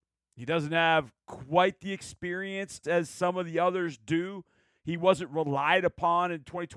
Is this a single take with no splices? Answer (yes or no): no